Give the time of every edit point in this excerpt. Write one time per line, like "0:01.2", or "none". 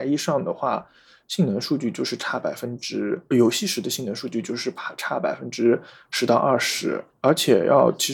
none